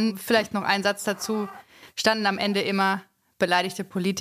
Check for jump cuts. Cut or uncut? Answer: uncut